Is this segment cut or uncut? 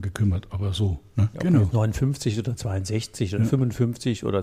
cut